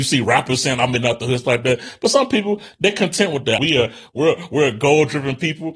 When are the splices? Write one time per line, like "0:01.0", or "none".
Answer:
0:03.6